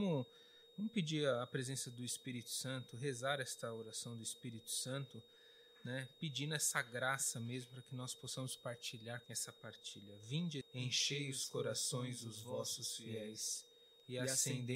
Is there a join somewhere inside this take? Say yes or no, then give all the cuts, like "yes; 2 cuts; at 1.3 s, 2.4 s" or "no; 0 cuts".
yes; 2 cuts; at 9.2 s, 10.6 s